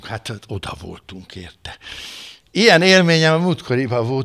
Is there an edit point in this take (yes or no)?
yes